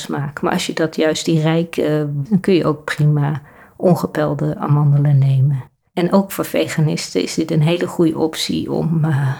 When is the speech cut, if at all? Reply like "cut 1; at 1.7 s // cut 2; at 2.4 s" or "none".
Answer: cut 1; at 2.3 s // cut 2; at 5.9 s

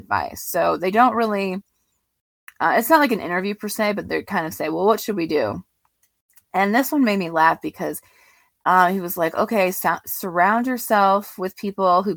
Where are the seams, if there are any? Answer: none

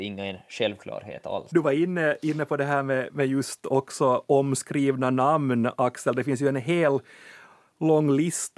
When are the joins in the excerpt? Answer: cut 1; at 1.5 s

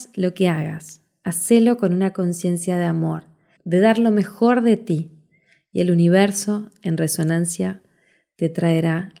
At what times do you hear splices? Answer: cut 1; at 3.6 s

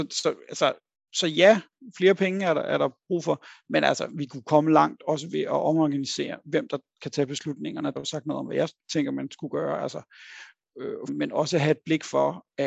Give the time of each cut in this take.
cut 1; at 8.0 s // cut 2; at 11.1 s

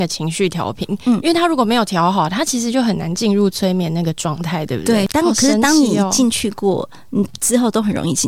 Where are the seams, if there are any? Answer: cut 1; at 5.1 s

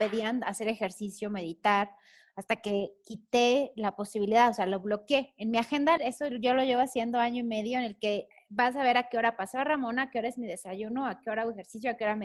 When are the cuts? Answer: cut 1; at 6.0 s

